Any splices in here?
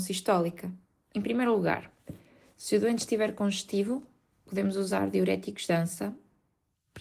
yes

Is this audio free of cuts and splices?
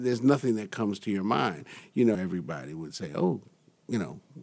no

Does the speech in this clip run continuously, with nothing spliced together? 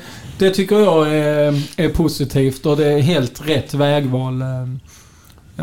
yes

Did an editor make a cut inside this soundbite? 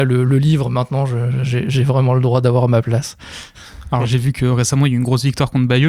no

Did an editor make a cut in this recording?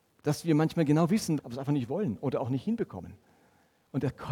yes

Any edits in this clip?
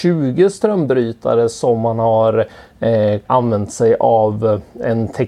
yes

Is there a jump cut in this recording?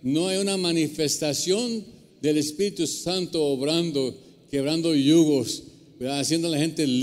no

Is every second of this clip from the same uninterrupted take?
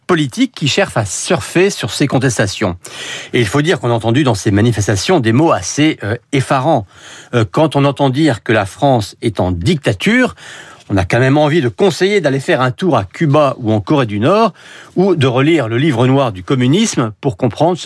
yes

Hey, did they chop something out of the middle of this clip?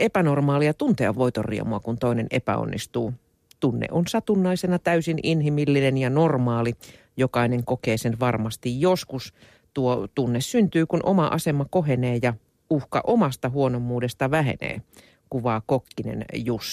no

